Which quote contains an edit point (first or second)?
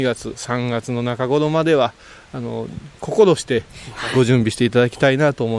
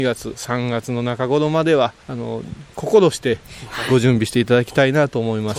second